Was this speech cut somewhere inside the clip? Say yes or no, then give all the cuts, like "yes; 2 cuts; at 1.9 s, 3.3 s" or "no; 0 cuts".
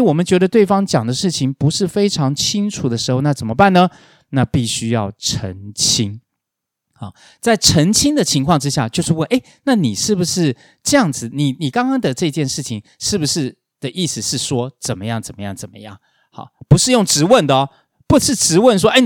no; 0 cuts